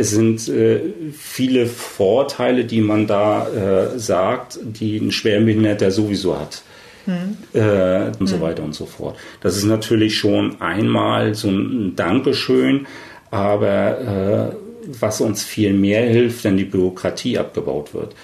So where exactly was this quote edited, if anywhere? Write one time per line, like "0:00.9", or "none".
0:08.2